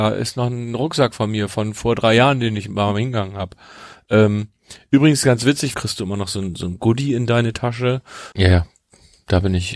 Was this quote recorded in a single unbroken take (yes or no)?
no